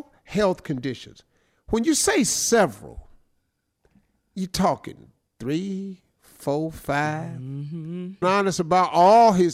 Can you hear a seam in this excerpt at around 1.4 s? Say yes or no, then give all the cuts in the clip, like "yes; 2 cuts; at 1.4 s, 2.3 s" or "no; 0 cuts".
no; 1 cut; at 8.2 s